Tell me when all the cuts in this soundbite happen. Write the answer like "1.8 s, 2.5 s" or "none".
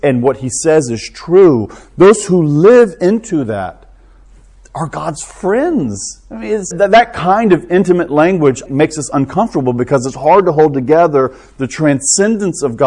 6.7 s, 8.7 s

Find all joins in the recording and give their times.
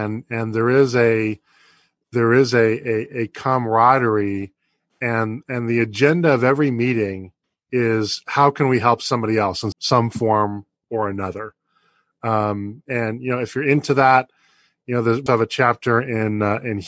9.7 s, 15.3 s

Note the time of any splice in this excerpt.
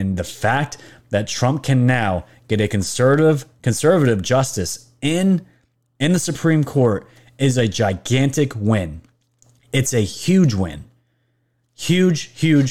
none

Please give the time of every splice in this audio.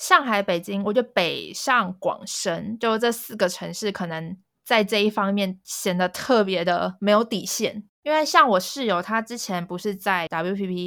none

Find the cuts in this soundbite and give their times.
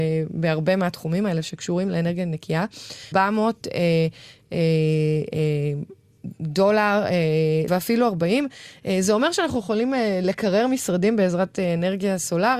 3.1 s, 7.7 s

